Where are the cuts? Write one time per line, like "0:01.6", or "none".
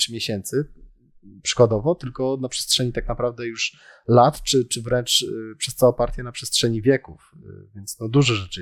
none